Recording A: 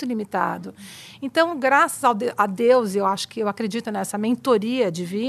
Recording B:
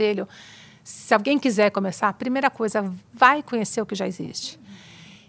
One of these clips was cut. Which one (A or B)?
A